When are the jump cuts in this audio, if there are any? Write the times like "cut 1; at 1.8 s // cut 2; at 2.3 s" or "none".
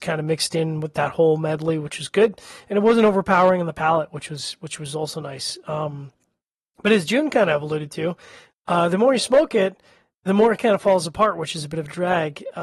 none